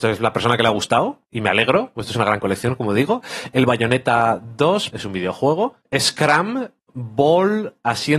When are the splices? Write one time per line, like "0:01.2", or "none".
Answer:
0:04.9